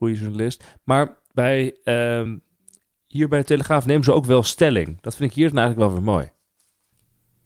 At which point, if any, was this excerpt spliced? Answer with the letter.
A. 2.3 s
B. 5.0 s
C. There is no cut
C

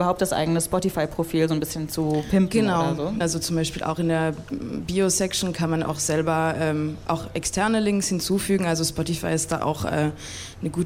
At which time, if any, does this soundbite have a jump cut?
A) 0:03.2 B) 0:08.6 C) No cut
A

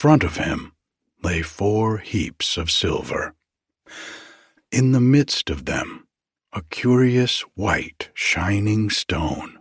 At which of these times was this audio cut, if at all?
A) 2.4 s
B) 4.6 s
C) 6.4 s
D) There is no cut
D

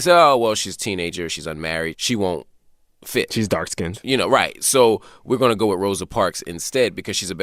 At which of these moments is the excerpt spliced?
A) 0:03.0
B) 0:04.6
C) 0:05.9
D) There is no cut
D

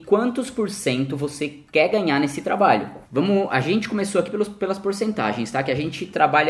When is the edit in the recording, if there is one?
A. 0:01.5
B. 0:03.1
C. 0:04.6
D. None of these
B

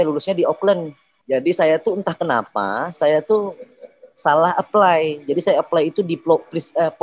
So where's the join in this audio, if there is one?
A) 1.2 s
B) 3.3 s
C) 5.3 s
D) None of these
A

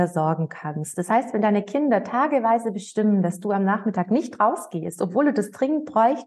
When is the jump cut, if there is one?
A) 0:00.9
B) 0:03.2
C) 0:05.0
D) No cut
A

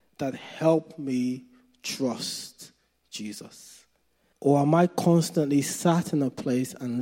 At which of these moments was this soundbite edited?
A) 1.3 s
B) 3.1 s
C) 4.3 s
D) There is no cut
C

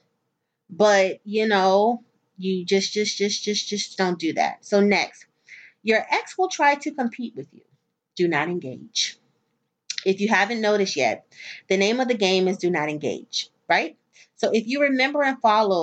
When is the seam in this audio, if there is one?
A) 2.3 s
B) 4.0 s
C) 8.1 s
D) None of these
B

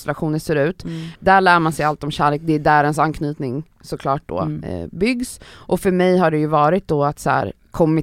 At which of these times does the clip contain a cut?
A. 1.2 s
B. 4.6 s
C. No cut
A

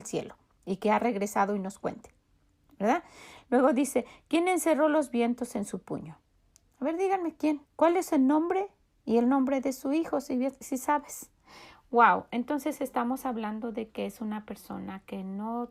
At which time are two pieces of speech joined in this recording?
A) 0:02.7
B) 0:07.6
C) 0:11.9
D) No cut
B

